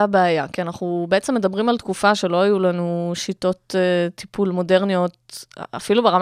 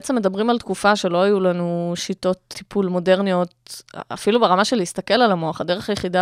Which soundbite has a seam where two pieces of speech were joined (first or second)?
second